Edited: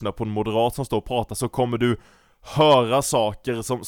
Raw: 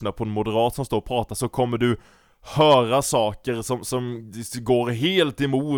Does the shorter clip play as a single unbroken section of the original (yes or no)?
yes